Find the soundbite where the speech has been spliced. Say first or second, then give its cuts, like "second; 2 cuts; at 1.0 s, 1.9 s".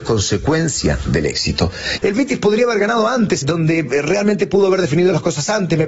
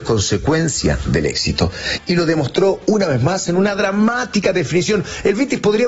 first; 2 cuts; at 2.0 s, 3.4 s